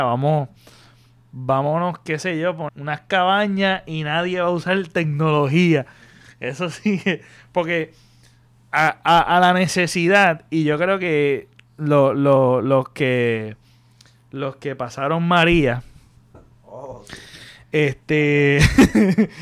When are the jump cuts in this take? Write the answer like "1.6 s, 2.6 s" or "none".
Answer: 2.7 s